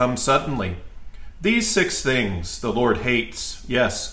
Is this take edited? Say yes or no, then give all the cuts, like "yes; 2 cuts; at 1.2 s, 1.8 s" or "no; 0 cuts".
yes; 1 cut; at 1.3 s